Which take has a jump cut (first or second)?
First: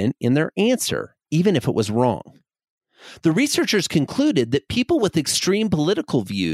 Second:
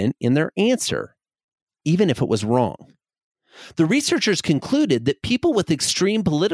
first